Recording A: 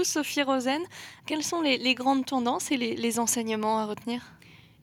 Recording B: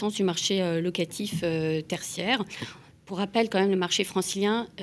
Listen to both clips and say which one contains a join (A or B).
A